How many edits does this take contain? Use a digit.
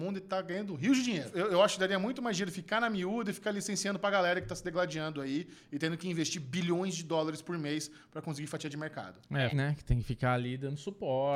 1